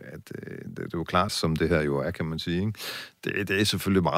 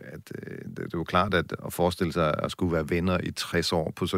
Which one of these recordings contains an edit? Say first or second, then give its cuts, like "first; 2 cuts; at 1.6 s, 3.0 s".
first; 1 cut; at 1.3 s